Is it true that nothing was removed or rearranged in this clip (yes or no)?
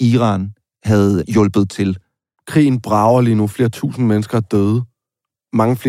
no